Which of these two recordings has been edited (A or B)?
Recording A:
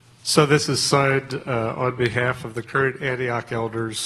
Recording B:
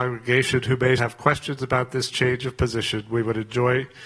B